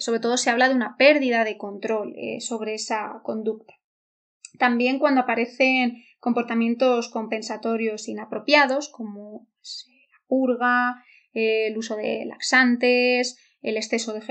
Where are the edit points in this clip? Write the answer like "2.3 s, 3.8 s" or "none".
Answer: none